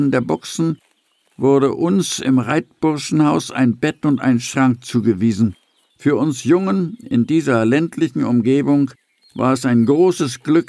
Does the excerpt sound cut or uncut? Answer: cut